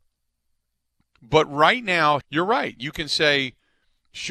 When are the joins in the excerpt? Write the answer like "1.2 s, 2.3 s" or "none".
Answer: 1.0 s, 2.2 s